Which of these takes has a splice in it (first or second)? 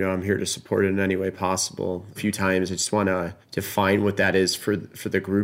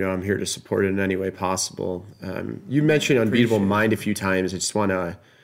first